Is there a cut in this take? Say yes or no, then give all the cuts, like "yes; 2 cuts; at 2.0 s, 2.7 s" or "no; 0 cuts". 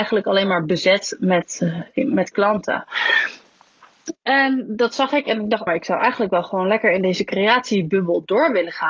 yes; 1 cut; at 5.7 s